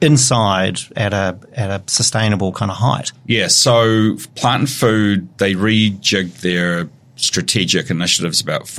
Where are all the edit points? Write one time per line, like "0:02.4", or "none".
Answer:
0:00.9
0:03.1